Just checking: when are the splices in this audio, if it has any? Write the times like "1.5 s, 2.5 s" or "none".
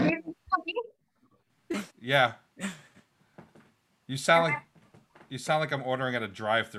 1.9 s